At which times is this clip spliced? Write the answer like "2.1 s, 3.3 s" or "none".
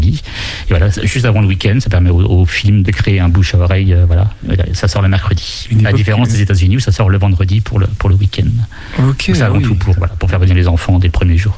2.8 s